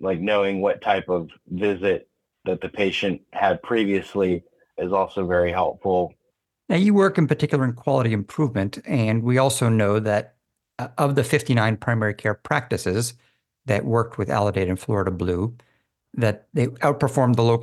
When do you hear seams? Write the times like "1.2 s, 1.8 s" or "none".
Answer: none